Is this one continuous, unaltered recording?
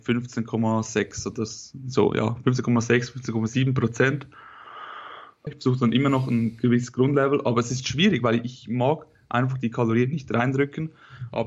no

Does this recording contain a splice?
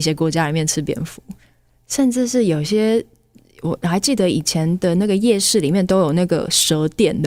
no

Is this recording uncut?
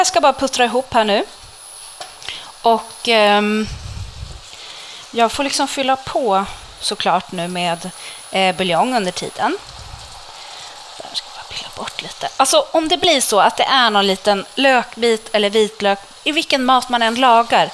yes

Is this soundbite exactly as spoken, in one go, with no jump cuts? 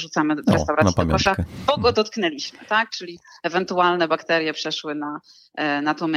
yes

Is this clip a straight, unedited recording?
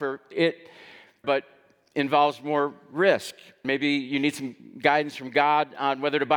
no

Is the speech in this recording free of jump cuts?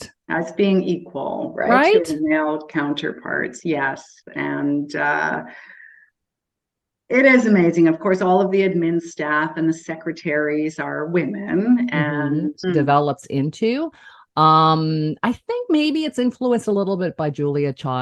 no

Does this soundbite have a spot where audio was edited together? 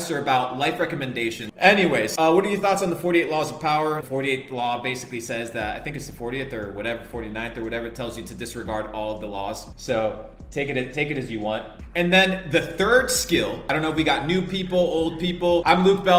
yes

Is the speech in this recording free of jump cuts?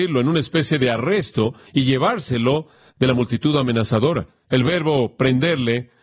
no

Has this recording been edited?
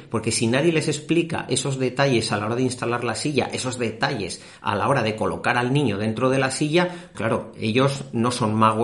yes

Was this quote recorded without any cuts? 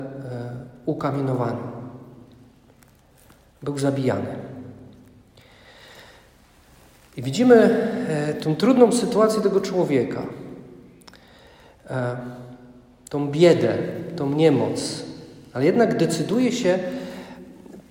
yes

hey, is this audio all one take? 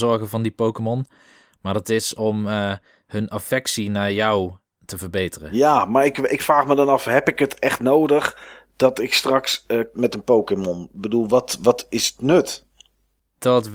no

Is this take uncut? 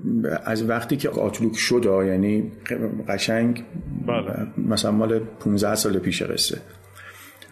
no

